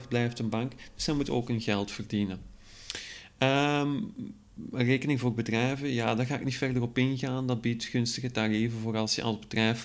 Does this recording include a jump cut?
no; 0 cuts

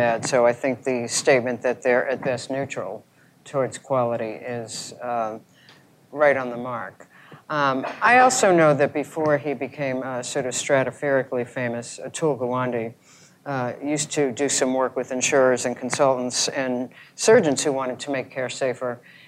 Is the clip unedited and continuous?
yes; 0 cuts

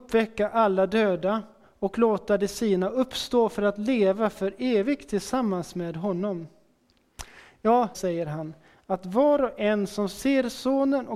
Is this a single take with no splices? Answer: no; 1 cut; at 7.9 s

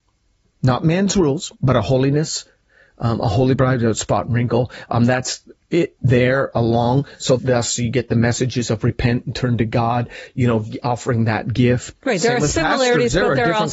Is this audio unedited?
no; 3 cuts; at 1.5 s, 7.4 s, 11.9 s

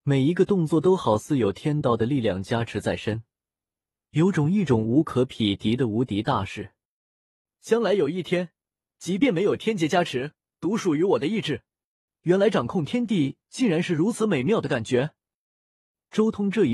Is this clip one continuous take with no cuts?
no; 2 cuts; at 10.5 s, 12.1 s

